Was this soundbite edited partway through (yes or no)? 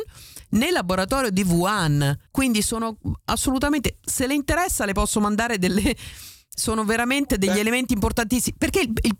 yes